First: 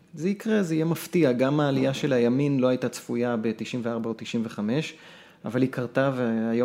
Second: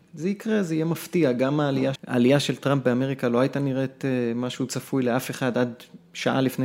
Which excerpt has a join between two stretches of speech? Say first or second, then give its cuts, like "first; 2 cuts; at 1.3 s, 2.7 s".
second; 1 cut; at 2.0 s